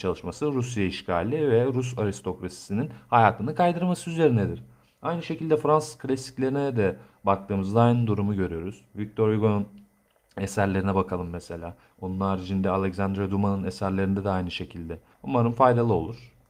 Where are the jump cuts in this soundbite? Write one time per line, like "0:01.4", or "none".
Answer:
0:11.9
0:15.1